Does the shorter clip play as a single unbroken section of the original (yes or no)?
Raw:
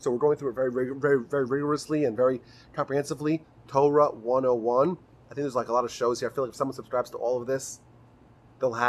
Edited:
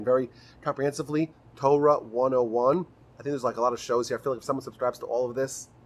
yes